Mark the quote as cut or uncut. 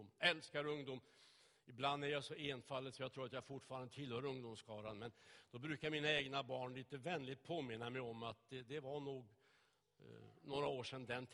uncut